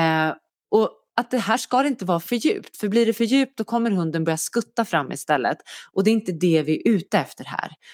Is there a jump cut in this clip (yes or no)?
no